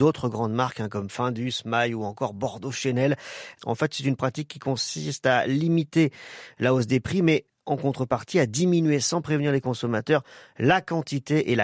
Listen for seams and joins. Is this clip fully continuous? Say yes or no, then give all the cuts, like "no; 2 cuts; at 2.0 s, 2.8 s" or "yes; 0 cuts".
no; 1 cut; at 3.6 s